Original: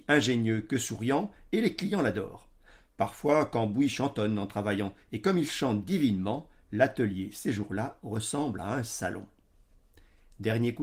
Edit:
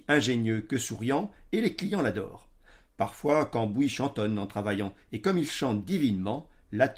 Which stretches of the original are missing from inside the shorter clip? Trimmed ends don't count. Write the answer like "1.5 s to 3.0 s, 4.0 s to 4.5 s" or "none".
none